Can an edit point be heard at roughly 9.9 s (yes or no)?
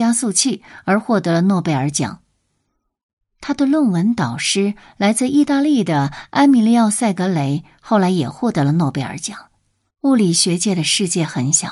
yes